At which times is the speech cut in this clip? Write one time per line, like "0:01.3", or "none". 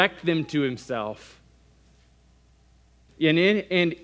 0:03.1